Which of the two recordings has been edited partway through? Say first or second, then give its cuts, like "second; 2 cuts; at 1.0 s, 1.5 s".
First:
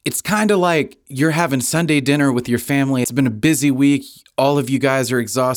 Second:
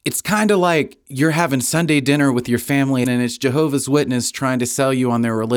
second; 1 cut; at 3.0 s